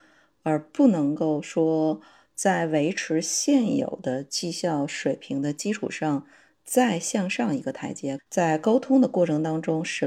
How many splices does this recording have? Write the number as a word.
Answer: one